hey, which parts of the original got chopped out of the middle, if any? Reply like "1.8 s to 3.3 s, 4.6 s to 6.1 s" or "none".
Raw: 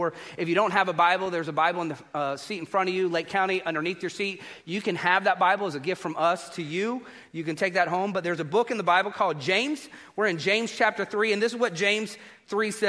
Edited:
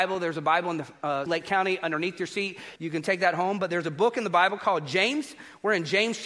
2.4 s to 3.1 s, 4.6 s to 7.3 s